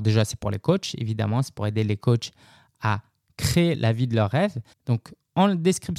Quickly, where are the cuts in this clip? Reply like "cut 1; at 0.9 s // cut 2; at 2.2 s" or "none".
cut 1; at 4.7 s